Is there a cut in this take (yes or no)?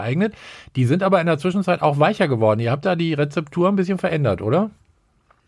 no